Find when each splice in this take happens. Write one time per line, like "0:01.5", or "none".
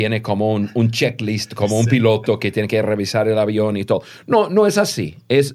none